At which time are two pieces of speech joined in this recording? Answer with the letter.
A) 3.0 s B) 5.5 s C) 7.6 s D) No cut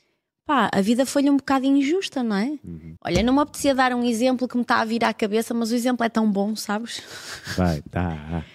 A